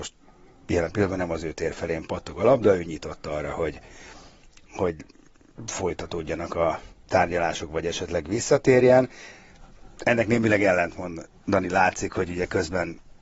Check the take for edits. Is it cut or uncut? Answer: uncut